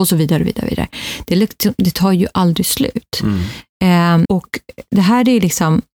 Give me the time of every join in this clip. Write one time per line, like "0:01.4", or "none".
0:04.2